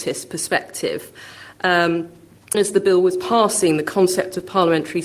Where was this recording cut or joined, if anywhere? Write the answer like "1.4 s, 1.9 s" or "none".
2.5 s